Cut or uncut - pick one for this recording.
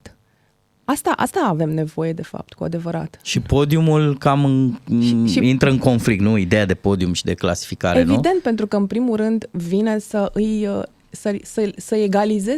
uncut